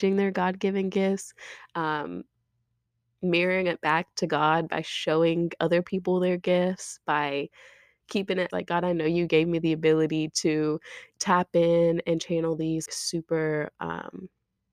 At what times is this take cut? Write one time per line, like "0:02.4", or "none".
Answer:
0:08.5
0:11.1
0:12.9